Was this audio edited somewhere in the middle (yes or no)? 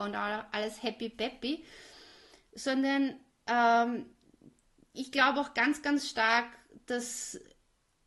no